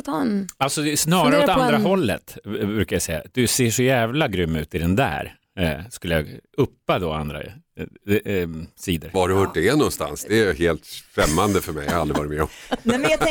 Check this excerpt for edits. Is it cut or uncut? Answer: cut